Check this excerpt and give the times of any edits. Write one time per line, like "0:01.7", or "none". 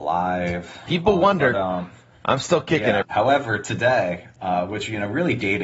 0:03.0

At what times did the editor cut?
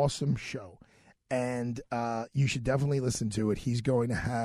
none

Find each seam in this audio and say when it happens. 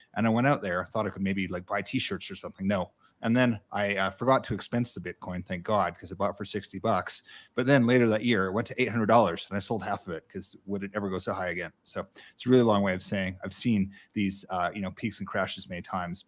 none

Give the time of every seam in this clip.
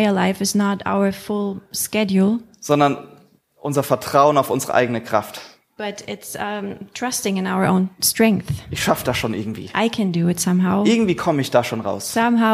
none

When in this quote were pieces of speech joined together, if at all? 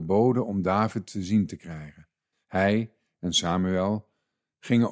0:02.3

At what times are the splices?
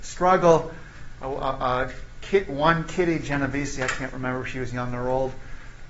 0:01.2

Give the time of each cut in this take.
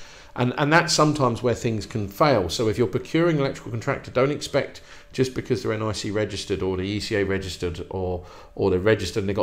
none

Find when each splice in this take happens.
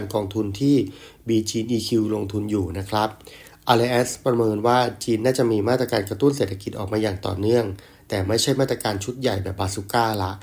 none

